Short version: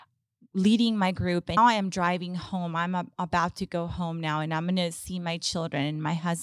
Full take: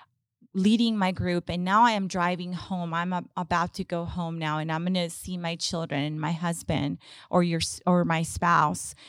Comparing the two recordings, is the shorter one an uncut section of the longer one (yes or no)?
no